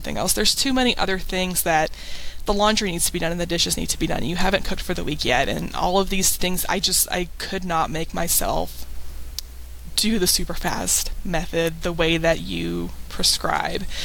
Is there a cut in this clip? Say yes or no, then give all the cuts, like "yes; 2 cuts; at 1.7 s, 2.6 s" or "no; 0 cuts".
no; 0 cuts